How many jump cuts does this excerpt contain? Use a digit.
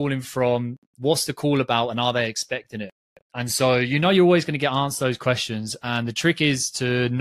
0